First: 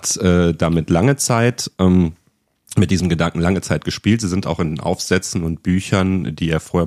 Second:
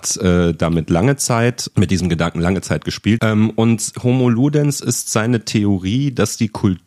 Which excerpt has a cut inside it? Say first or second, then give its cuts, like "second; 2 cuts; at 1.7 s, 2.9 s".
second; 2 cuts; at 1.7 s, 3.2 s